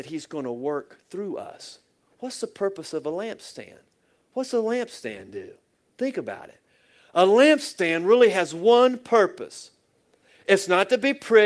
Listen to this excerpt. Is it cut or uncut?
uncut